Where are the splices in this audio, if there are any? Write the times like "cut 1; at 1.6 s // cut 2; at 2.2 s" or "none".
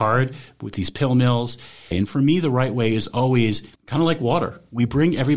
cut 1; at 1.9 s // cut 2; at 3.8 s